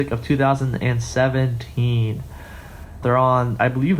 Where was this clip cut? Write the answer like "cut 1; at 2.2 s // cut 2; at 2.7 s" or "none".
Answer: cut 1; at 3.0 s